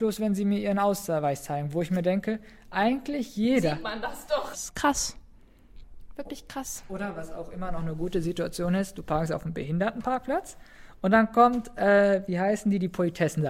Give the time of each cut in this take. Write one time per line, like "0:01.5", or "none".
0:04.5